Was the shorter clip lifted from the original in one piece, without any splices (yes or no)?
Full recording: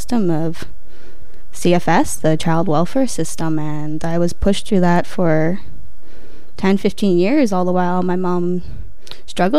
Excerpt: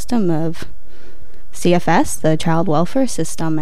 yes